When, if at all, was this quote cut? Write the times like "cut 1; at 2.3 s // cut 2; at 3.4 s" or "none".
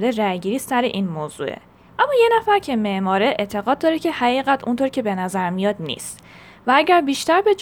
cut 1; at 1.9 s